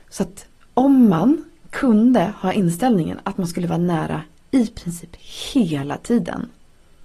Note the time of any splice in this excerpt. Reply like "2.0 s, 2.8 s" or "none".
none